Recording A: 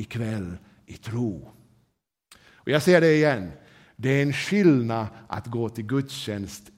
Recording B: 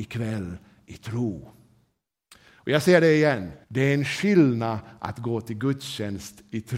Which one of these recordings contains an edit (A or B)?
B